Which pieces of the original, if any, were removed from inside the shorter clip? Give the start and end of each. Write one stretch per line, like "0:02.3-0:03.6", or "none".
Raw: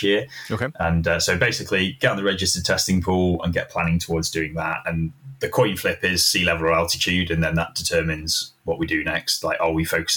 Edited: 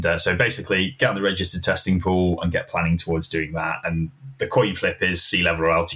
none